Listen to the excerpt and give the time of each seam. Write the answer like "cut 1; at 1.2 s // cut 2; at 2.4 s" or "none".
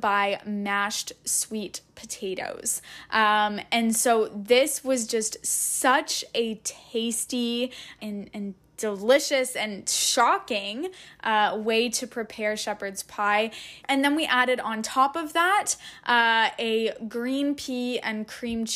cut 1; at 8.0 s // cut 2; at 13.8 s